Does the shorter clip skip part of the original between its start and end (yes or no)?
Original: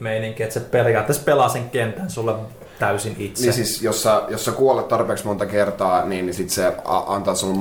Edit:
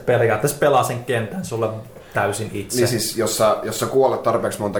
no